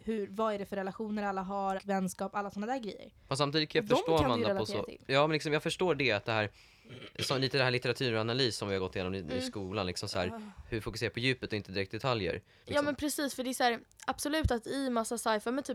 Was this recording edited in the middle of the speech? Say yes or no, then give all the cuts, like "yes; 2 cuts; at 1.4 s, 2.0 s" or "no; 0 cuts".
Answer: yes; 2 cuts; at 1.8 s, 12.6 s